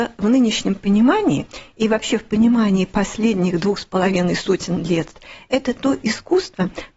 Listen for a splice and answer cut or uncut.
uncut